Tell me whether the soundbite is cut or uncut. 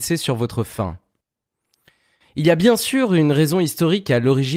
uncut